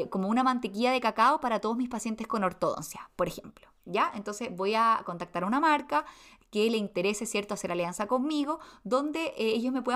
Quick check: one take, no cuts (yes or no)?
yes